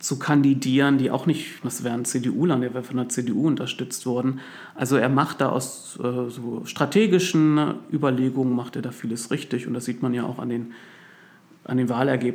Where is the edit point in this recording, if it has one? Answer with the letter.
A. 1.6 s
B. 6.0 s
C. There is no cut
A